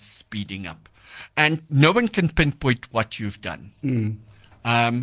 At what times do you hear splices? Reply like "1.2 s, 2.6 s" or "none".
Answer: none